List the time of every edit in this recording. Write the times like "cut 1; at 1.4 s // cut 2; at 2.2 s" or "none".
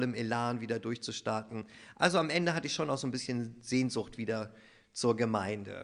none